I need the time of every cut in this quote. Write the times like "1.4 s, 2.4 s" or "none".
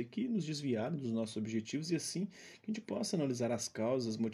none